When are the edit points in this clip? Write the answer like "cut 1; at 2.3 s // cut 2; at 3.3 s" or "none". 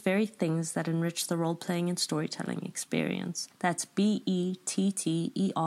cut 1; at 3.5 s